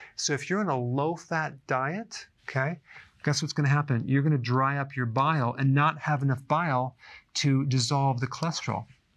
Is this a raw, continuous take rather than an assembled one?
no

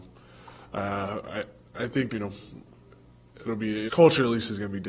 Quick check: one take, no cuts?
no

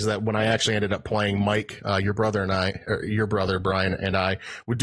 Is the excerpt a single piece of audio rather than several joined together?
yes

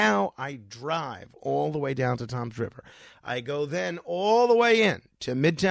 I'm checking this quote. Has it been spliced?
no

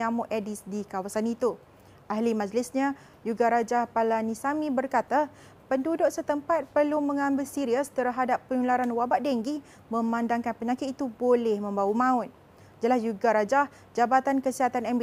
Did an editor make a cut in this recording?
no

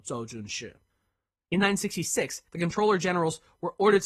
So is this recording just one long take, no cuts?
no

